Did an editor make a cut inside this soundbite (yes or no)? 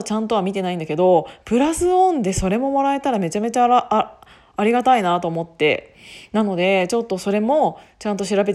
no